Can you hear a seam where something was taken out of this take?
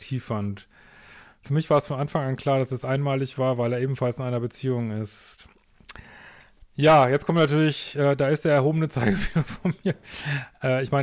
no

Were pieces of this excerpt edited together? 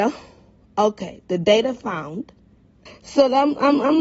yes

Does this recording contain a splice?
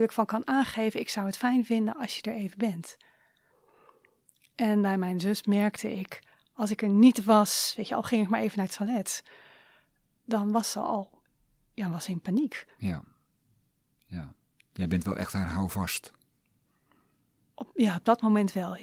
no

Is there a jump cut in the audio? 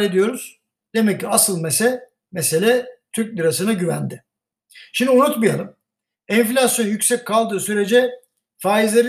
no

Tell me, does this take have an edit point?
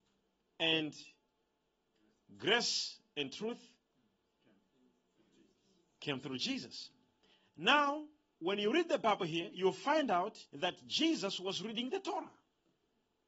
yes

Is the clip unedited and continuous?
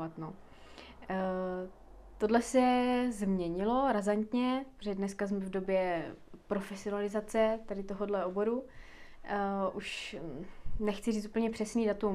yes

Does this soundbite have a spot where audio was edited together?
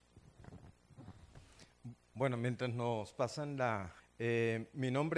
yes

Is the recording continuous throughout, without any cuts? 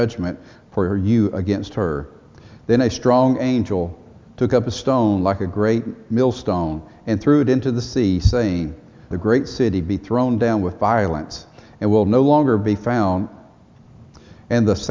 no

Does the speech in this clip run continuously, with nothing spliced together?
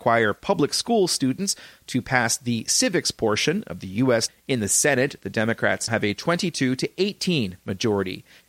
no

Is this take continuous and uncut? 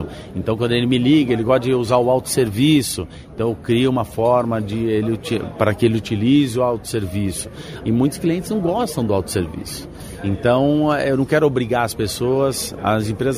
no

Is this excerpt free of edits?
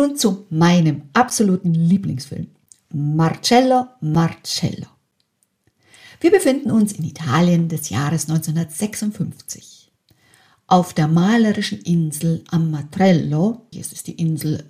no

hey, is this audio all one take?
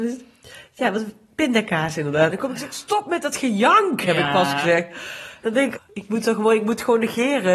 no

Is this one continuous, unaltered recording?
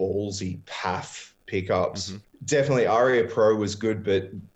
no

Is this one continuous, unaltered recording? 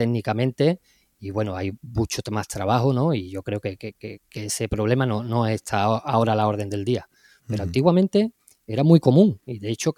yes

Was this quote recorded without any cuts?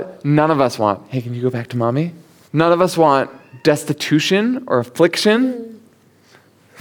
no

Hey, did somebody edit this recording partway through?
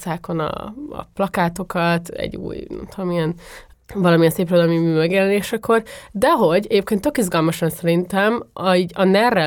no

